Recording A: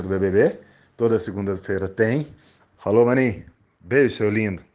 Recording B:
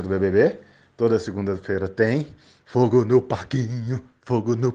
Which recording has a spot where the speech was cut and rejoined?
A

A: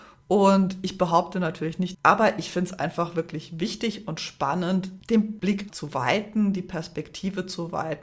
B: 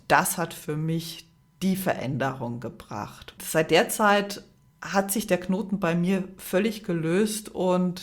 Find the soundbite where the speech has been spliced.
A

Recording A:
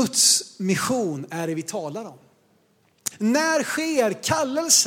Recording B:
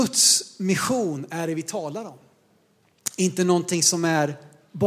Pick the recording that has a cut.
A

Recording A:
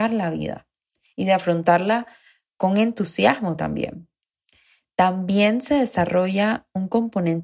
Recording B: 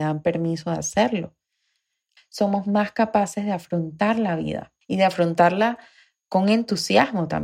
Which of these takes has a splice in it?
B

